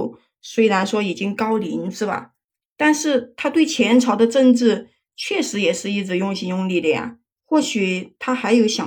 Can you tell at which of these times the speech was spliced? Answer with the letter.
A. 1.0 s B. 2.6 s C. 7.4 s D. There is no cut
C